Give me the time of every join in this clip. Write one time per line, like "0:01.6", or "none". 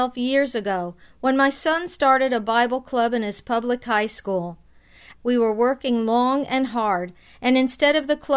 0:05.1